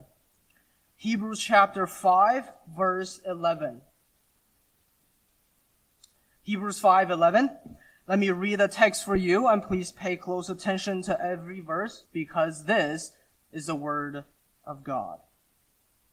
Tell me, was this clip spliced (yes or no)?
yes